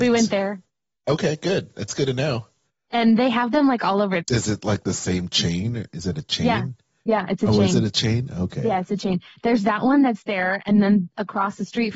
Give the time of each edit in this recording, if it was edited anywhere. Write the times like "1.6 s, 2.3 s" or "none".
4.2 s